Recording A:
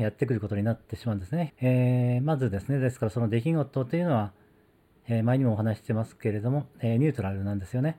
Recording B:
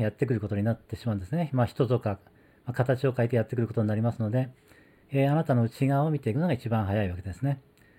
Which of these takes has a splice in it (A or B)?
A